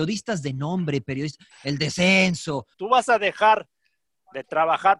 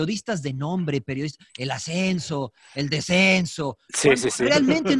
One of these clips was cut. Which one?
first; 2 cuts; at 1.5 s, 2.7 s

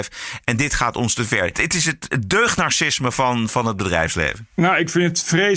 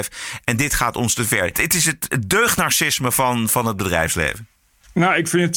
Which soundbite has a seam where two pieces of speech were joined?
first; 1 cut; at 4.5 s

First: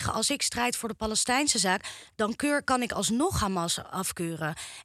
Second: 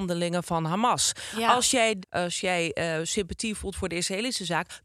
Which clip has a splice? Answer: second; 1 cut; at 2.0 s

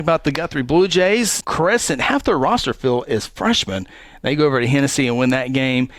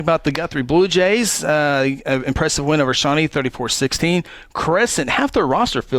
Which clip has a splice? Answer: first; 1 cut; at 1.4 s

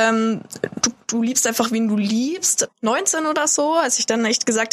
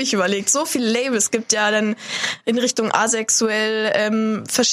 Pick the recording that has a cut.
first; 1 cut; at 2.7 s

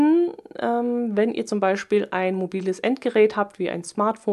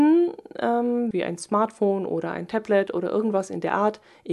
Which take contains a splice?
second; 1 cut; at 1.1 s

